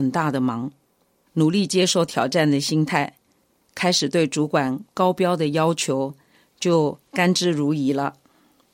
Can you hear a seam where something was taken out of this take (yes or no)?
yes